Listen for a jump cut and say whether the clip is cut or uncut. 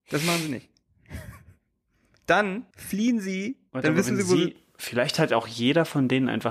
cut